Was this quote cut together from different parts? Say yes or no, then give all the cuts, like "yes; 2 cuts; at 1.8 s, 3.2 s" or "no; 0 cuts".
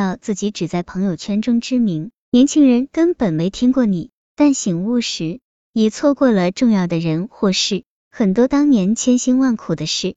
yes; 2 cuts; at 4.3 s, 8.0 s